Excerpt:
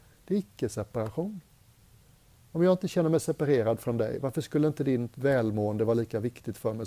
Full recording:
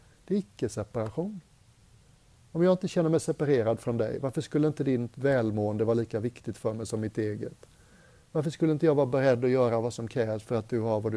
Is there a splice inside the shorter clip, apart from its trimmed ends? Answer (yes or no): no